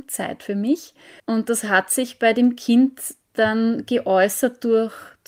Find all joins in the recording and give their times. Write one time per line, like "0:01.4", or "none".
0:01.2

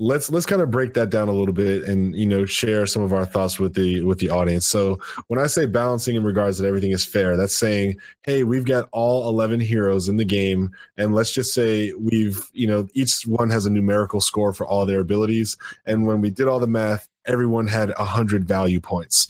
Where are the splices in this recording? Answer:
none

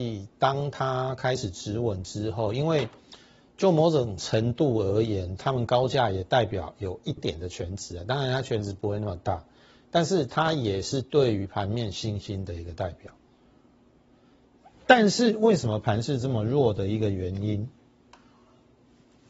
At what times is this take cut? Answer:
0:07.2

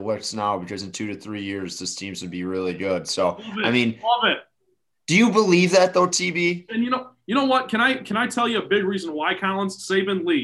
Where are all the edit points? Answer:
0:06.7

